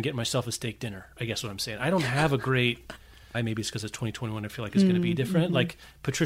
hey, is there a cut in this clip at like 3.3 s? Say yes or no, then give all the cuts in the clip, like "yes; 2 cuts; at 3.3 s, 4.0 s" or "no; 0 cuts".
yes; 1 cut; at 3.3 s